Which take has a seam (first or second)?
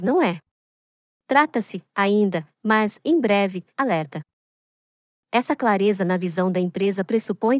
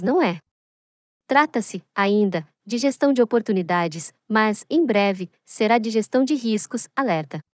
first